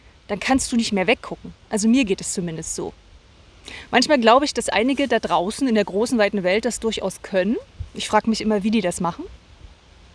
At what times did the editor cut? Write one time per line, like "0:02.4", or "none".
none